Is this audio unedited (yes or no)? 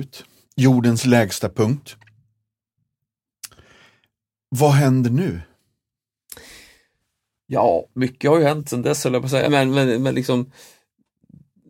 no